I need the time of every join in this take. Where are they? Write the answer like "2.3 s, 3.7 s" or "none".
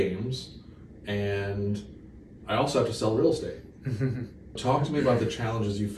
4.6 s